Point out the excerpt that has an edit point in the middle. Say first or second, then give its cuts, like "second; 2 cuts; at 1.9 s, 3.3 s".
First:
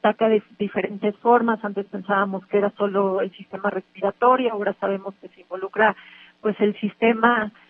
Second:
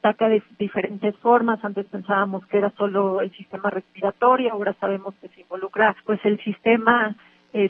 second; 1 cut; at 6.0 s